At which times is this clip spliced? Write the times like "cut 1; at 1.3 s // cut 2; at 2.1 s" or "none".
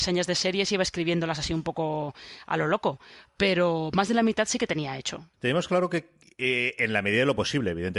cut 1; at 5.3 s